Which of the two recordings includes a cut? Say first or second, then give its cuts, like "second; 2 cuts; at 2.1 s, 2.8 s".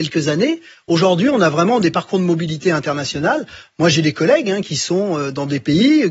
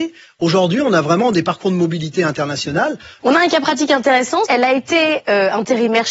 second; 2 cuts; at 3.2 s, 4.5 s